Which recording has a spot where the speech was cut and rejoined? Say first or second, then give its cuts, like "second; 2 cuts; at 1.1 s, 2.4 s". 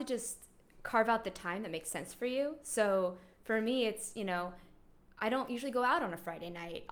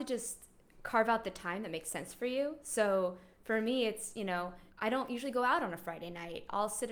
second; 1 cut; at 4.7 s